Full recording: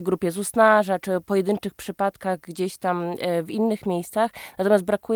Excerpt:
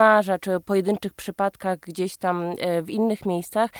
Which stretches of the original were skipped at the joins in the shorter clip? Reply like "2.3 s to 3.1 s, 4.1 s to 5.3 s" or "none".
none